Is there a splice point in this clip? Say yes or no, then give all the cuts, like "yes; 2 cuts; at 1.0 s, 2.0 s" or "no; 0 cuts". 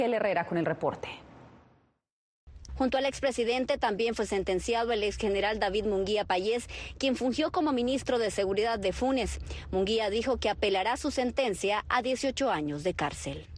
yes; 1 cut; at 2.7 s